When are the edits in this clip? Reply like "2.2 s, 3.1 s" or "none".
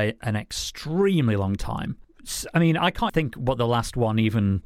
2.0 s, 3.1 s